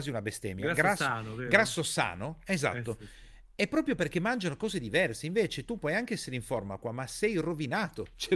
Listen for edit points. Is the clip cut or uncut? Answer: uncut